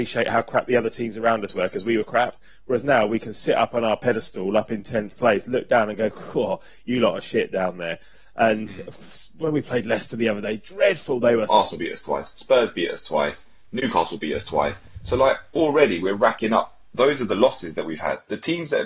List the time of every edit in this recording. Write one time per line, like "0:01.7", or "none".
0:11.5